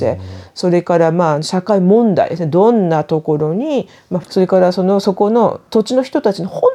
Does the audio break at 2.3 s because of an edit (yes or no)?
no